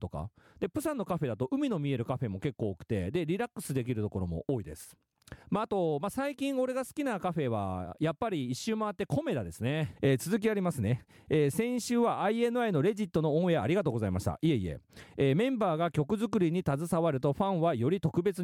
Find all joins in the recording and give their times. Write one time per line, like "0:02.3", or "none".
0:05.4
0:10.0